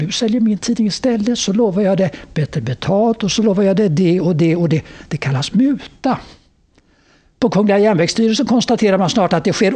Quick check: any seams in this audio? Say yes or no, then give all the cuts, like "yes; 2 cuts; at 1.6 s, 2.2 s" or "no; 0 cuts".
no; 0 cuts